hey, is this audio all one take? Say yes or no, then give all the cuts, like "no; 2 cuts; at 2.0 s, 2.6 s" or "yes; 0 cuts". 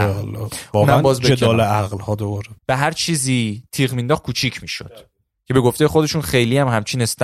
no; 1 cut; at 2.6 s